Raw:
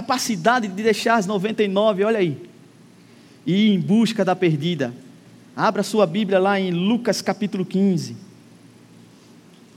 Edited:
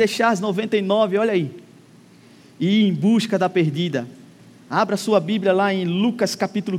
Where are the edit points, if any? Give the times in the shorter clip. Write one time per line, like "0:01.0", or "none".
none